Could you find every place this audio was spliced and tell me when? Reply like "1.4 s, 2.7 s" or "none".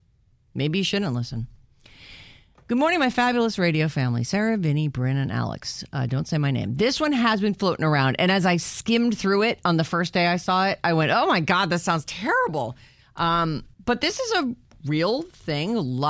13.7 s